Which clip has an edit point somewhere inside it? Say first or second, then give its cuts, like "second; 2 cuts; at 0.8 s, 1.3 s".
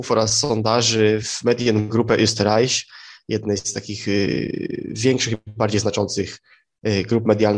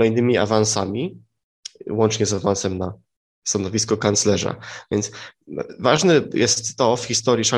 first; 1 cut; at 1.2 s